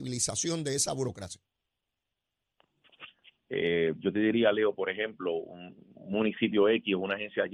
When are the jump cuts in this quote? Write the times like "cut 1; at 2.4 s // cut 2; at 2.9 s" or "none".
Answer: cut 1; at 3.4 s